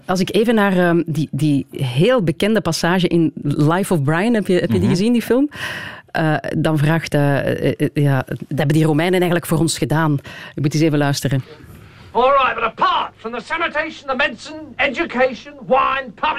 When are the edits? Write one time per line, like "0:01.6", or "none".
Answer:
0:08.6